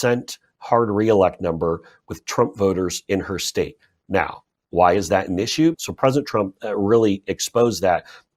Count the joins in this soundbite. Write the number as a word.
one